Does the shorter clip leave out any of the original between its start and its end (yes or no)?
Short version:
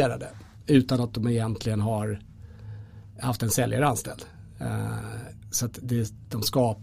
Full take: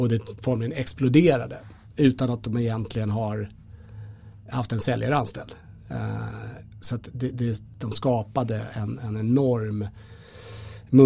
yes